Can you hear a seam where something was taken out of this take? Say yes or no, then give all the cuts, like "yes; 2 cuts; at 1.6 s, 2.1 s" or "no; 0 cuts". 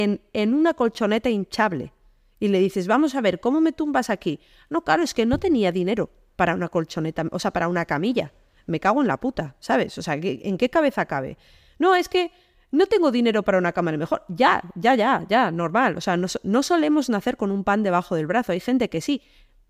no; 0 cuts